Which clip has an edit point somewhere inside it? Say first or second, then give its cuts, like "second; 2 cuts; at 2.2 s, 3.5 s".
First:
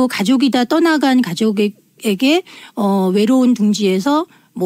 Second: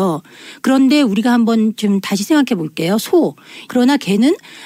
second; 1 cut; at 3.7 s